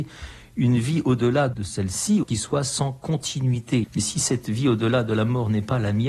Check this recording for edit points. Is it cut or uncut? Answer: cut